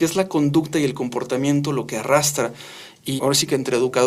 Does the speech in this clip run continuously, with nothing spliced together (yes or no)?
no